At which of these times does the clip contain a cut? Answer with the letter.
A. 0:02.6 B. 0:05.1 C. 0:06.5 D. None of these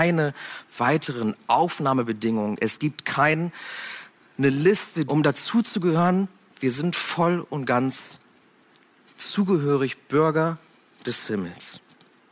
B